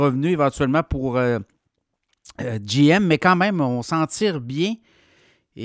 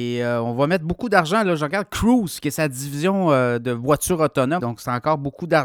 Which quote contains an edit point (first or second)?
second